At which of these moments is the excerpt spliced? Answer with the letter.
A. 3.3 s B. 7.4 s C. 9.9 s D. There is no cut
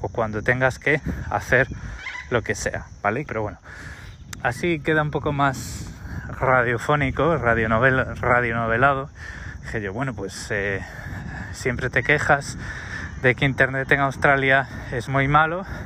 A